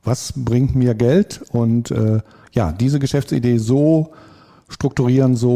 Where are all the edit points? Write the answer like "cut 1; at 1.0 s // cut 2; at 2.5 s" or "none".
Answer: none